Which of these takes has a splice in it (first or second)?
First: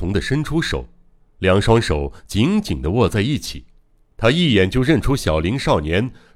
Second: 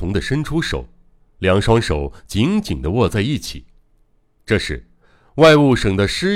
first